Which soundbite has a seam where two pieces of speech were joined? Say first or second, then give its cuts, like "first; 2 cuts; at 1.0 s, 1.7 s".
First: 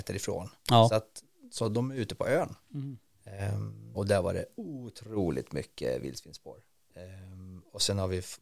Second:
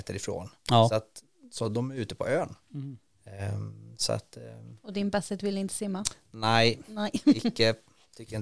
first; 1 cut; at 3.9 s